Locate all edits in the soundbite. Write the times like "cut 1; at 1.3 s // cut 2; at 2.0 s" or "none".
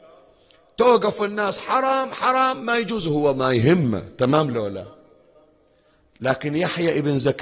none

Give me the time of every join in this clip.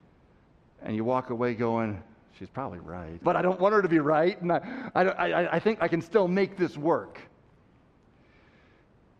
cut 1; at 3.2 s

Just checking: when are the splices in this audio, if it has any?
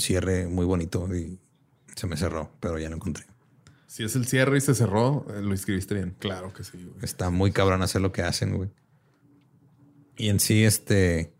cut 1; at 6.2 s

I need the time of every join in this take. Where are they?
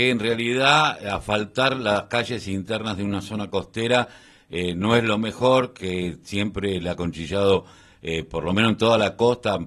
none

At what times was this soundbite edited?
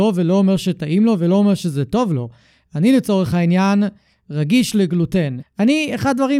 cut 1; at 5.4 s

